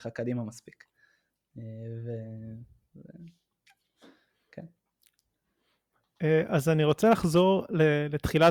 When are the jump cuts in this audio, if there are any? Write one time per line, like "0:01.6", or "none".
none